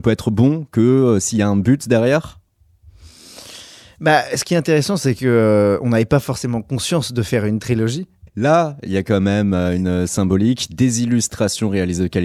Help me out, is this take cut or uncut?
cut